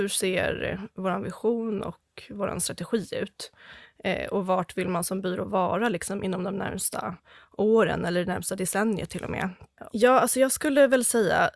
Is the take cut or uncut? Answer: cut